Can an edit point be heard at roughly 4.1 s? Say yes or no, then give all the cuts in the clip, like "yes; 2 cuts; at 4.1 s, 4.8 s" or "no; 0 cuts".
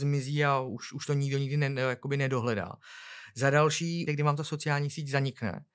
yes; 1 cut; at 4.1 s